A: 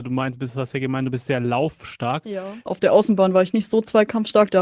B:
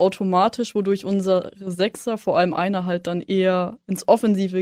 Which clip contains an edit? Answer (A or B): A